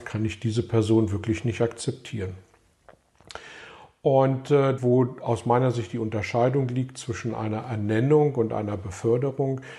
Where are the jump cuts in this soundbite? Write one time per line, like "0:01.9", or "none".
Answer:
0:04.8

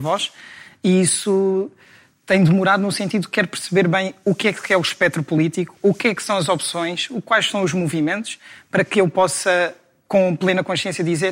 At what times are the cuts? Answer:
none

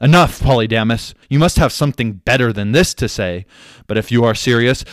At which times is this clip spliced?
0:01.2

